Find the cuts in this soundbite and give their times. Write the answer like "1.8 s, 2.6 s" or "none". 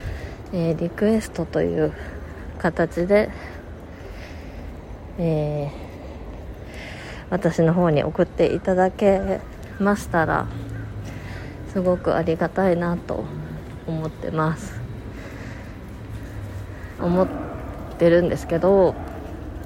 17.0 s